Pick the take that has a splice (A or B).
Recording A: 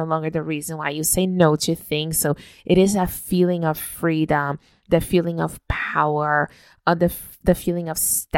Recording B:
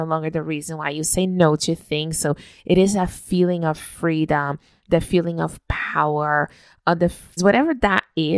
B